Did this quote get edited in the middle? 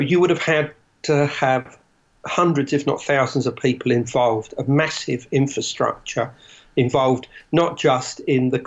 no; 0 cuts

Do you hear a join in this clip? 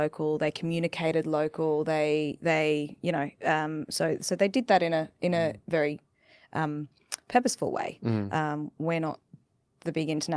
no; 0 cuts

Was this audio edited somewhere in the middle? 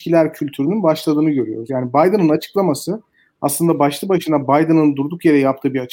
no; 0 cuts

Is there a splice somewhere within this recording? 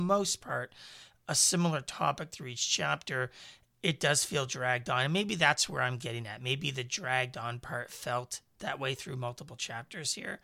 no; 0 cuts

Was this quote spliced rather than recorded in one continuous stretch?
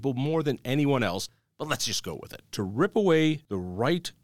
yes; 1 cut; at 2.5 s

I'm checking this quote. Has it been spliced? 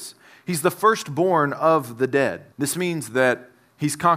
yes; 1 cut; at 2.5 s

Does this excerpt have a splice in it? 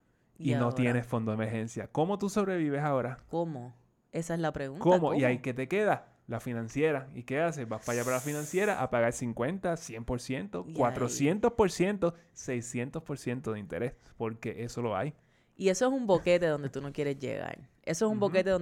no; 0 cuts

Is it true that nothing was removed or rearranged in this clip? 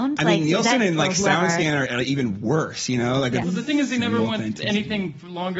no; 1 cut; at 3.4 s

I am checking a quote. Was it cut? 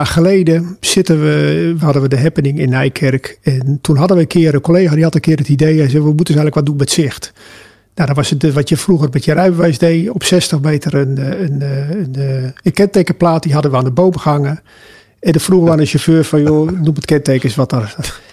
yes; 1 cut; at 1.8 s

